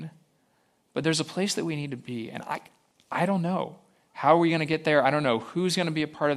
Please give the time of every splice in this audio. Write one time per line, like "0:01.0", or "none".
none